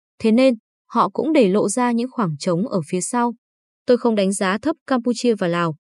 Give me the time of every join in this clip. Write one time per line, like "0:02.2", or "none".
none